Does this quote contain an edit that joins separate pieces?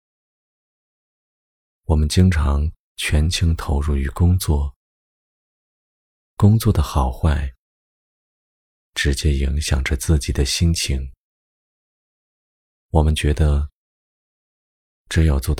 no; 0 cuts

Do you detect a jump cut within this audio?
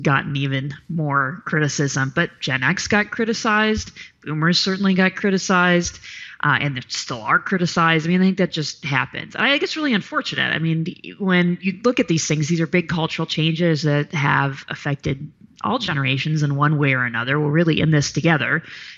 no; 0 cuts

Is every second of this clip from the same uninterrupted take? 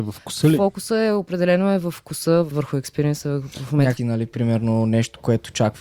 no; 2 cuts; at 2.5 s, 4.0 s

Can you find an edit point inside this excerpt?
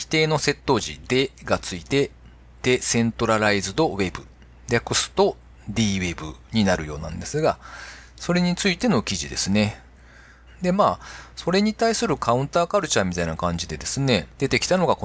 yes; 1 cut; at 10.5 s

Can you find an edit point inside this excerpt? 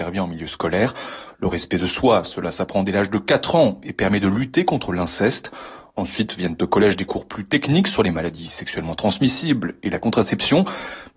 no; 0 cuts

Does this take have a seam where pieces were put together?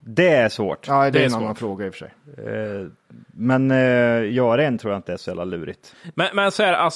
no; 0 cuts

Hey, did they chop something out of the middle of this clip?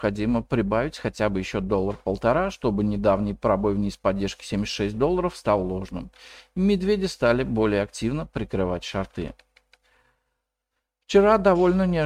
no; 0 cuts

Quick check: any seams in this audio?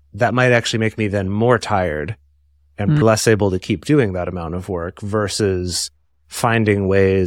yes; 1 cut; at 3.0 s

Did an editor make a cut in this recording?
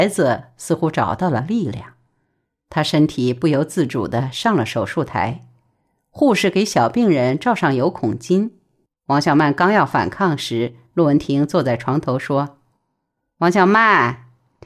yes; 1 cut; at 8.9 s

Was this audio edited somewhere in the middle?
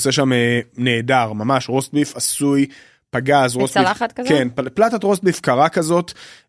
no; 0 cuts

